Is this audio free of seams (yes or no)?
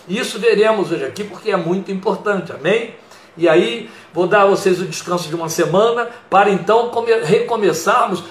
yes